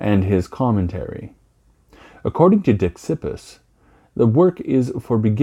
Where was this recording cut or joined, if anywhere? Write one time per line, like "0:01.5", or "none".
none